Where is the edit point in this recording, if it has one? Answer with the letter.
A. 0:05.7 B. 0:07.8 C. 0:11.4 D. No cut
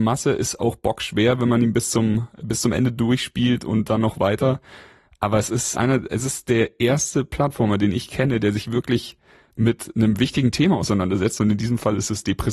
A